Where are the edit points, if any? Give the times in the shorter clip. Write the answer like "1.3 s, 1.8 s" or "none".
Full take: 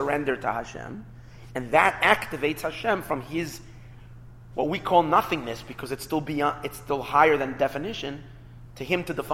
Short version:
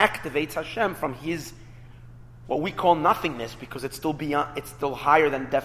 none

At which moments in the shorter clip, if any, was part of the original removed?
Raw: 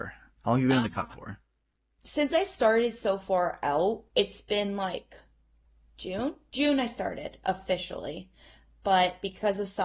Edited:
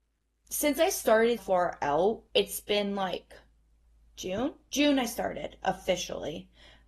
1.4 s

